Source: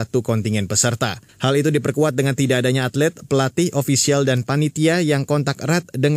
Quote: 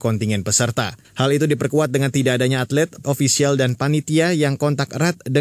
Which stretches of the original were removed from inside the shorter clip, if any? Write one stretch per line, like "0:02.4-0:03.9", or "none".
0:03.3-0:03.7